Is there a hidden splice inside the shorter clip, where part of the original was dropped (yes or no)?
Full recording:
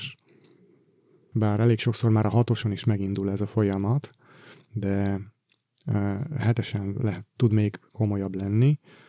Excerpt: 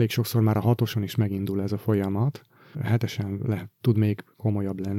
yes